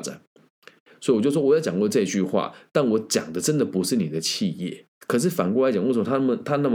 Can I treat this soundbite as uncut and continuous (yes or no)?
no